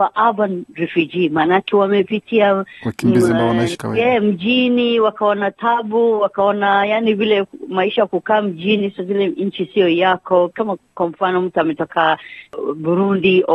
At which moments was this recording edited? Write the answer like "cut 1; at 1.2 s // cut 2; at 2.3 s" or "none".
cut 1; at 3.7 s